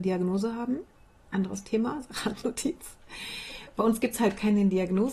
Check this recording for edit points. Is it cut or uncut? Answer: uncut